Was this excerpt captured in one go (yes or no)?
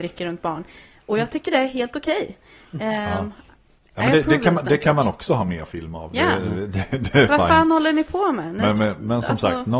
yes